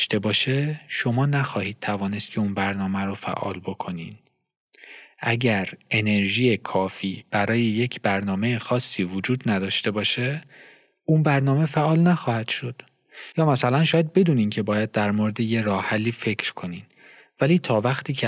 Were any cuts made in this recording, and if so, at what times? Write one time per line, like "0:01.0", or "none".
0:13.3